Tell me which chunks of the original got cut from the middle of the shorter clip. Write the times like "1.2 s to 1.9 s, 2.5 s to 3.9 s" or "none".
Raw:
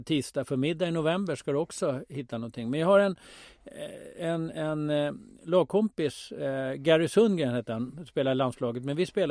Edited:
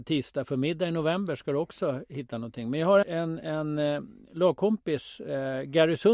3.0 s to 4.1 s

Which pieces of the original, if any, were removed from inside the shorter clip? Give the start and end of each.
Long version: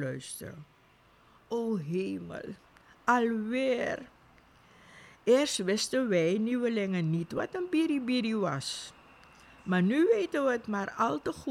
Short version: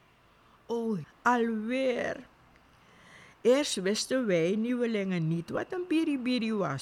1.8 s to 2.9 s

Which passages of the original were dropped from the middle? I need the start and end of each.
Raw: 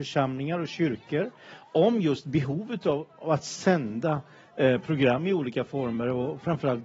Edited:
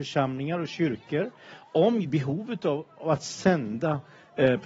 2.0 s to 2.2 s

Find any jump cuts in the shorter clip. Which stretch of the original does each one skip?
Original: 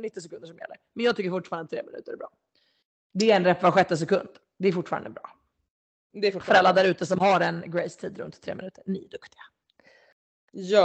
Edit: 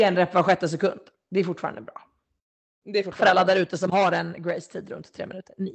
none

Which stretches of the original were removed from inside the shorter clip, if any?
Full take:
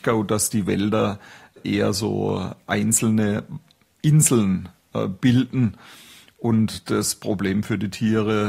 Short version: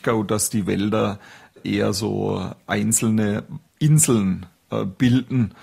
3.7 s to 3.9 s

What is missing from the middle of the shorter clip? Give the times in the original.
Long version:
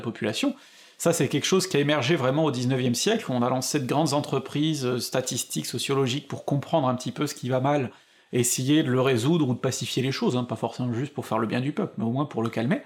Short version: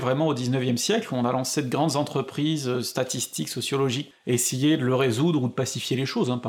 6.3 s to 8.2 s

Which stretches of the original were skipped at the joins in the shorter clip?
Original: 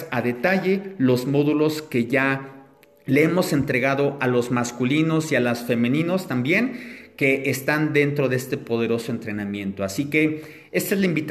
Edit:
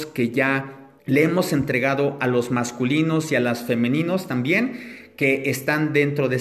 2.7 s to 3.0 s

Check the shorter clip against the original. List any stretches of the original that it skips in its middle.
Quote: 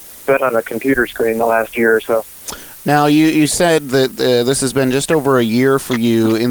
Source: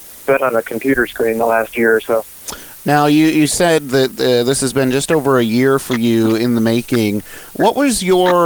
none

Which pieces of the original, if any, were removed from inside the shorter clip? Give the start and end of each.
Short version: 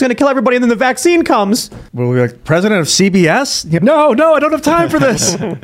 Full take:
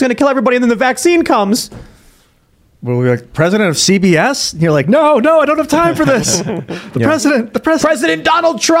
1.9 s to 2.8 s, 4.7 s to 4.8 s

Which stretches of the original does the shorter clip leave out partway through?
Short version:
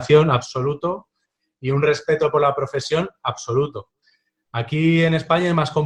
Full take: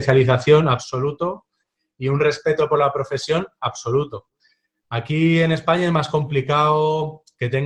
none

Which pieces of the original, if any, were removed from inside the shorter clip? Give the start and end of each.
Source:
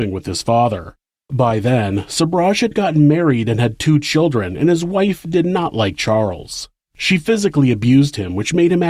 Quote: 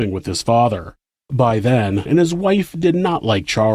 2.1 s to 4.6 s

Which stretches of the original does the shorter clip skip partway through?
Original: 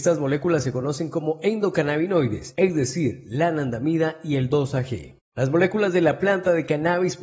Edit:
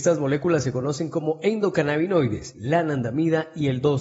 2.5 s to 3.2 s

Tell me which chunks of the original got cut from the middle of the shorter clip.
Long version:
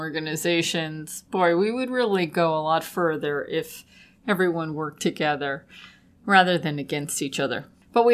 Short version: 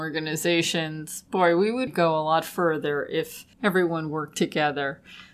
1.9 s to 2.3 s, 3.9 s to 4.2 s

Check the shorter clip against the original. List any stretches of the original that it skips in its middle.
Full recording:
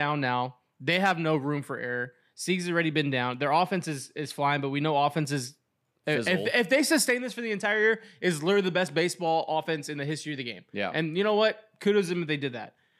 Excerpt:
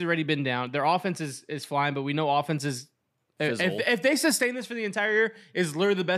none

